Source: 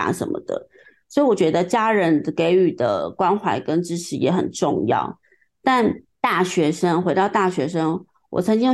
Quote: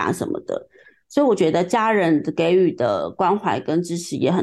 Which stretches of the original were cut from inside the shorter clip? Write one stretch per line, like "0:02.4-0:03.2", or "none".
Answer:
none